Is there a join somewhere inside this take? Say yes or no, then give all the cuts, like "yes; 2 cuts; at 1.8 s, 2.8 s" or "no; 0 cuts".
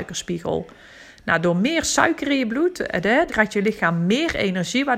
yes; 1 cut; at 3.3 s